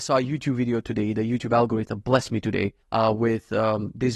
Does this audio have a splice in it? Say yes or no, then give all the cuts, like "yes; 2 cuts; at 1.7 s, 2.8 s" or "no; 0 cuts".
yes; 1 cut; at 2.8 s